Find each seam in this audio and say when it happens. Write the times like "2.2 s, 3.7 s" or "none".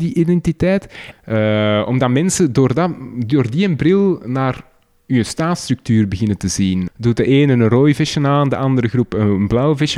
1.1 s, 6.9 s